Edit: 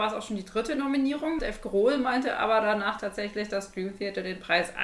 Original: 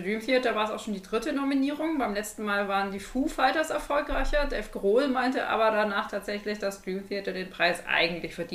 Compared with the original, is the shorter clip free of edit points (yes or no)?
no